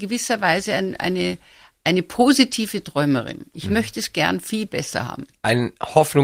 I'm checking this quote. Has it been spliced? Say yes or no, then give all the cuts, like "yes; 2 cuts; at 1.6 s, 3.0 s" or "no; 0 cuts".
no; 0 cuts